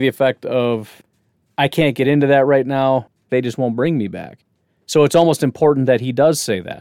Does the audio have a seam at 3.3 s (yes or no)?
yes